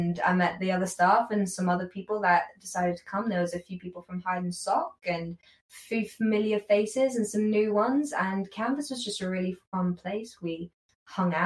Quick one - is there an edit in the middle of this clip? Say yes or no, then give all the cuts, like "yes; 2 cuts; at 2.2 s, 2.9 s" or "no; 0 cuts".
no; 0 cuts